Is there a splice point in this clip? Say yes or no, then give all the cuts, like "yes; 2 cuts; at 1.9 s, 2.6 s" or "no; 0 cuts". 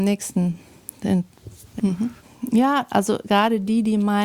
yes; 1 cut; at 1.8 s